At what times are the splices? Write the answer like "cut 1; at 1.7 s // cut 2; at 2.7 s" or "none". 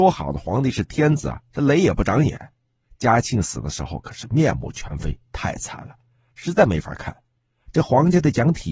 none